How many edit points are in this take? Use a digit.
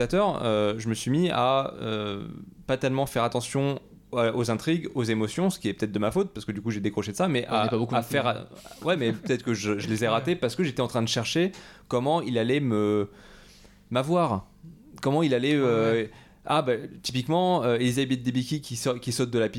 0